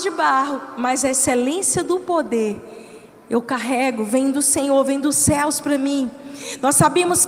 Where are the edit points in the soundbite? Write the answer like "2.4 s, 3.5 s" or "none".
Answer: none